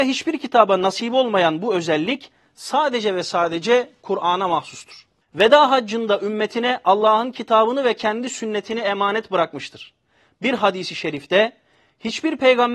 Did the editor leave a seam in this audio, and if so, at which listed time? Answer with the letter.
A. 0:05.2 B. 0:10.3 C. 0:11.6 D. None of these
A